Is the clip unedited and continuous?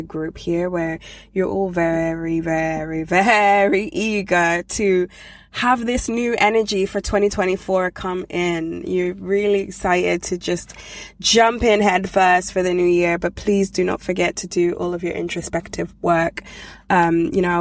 yes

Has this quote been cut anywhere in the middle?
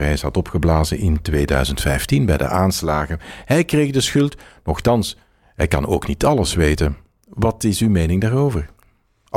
yes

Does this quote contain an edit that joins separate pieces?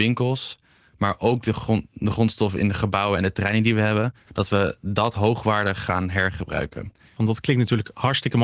yes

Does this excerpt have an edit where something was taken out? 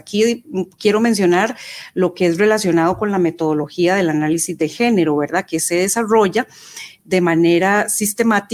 yes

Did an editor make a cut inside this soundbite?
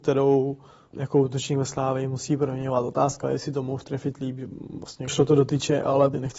no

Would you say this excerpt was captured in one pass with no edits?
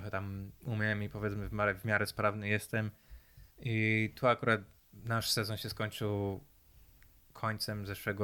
no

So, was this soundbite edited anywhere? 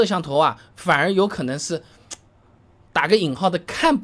no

